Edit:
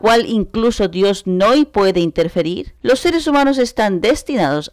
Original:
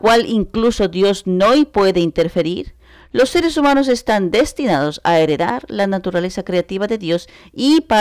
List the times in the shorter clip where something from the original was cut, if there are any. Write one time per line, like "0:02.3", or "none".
0:02.8